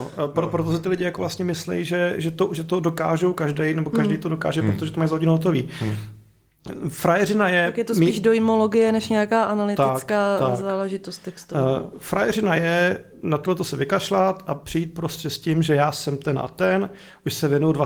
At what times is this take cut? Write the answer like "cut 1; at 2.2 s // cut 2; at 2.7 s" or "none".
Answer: none